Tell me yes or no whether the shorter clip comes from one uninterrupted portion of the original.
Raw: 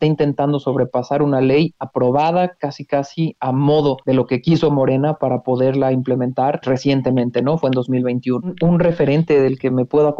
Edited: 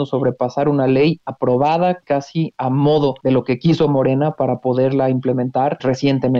no